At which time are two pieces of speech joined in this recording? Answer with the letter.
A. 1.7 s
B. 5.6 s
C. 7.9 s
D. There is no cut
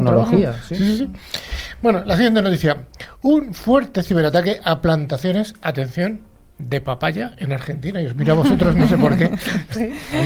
D